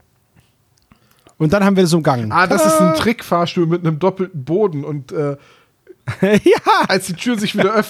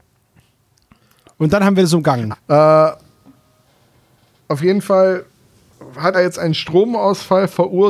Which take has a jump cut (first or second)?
second